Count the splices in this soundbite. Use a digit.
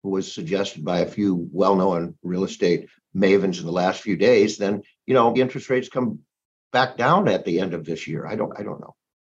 1